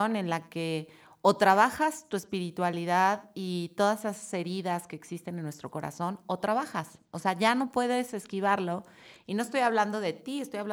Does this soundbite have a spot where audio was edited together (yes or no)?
no